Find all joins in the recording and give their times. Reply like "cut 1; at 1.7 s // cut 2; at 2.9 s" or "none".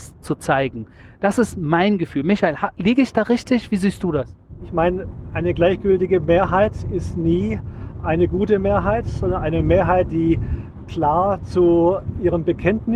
cut 1; at 4.6 s